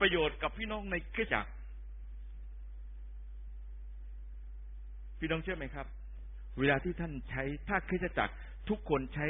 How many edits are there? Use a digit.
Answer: 1